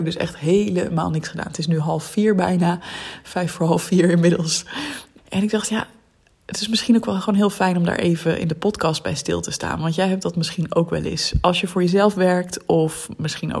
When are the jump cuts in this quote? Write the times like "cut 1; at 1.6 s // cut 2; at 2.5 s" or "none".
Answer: cut 1; at 5.2 s